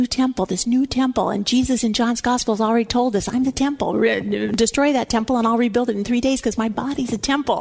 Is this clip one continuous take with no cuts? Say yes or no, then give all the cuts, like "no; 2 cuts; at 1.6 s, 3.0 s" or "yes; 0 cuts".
yes; 0 cuts